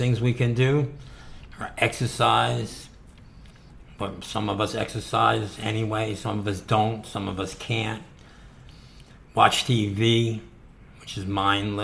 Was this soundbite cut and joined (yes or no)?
no